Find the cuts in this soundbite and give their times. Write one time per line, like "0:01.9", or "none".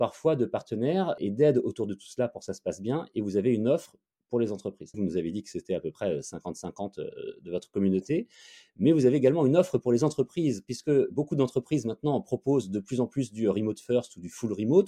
0:04.9